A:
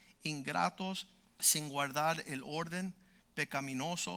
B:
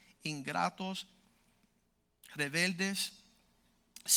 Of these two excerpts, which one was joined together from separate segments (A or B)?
A